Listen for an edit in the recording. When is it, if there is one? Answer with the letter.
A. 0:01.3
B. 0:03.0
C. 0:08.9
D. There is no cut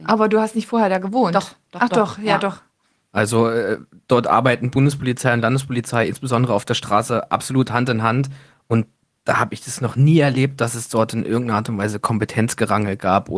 B